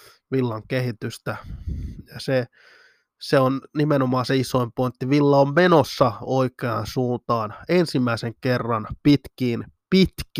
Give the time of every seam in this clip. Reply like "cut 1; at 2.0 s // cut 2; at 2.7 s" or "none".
none